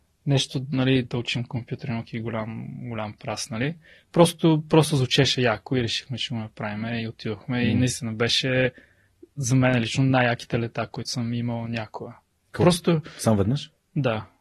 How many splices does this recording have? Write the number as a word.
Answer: one